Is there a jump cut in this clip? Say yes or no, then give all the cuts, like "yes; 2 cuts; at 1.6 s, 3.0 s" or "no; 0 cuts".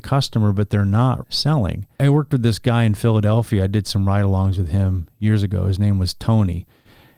yes; 1 cut; at 1.2 s